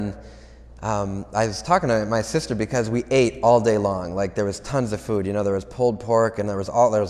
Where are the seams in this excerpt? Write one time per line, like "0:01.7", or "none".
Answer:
none